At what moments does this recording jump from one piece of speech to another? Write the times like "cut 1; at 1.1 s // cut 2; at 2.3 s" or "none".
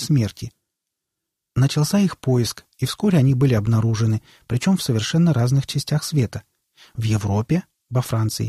none